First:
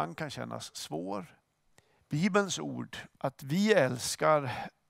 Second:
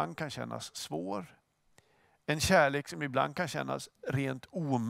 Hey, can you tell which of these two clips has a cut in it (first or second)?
first